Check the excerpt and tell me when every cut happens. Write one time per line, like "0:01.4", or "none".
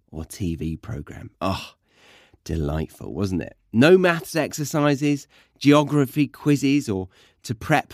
none